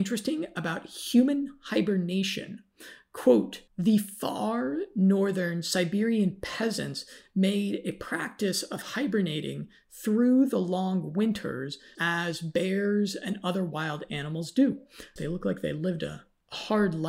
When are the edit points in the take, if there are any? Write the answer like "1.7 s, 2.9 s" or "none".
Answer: 3.7 s, 12.0 s, 15.2 s